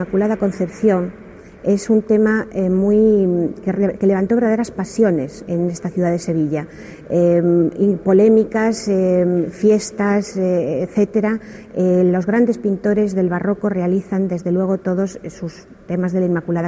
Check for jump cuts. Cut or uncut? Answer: uncut